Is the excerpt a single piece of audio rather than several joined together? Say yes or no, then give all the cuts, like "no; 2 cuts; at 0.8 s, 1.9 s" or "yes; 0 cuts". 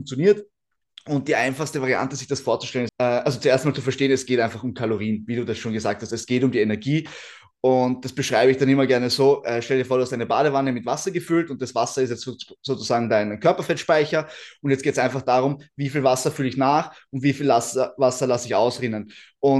no; 1 cut; at 2.9 s